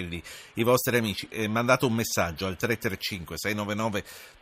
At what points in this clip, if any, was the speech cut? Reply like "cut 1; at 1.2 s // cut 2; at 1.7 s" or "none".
cut 1; at 1.3 s